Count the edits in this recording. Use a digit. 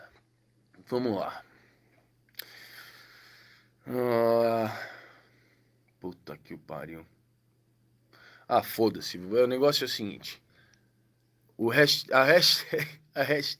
0